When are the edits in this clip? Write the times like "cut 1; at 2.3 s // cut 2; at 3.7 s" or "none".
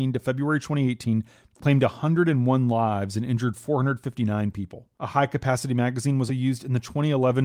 cut 1; at 4.9 s // cut 2; at 6.3 s